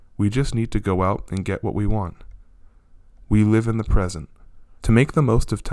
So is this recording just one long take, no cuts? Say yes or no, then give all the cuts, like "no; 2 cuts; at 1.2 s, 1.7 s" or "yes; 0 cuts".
no; 1 cut; at 4.8 s